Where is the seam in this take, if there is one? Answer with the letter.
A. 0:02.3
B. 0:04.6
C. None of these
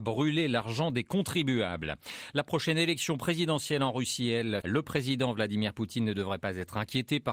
B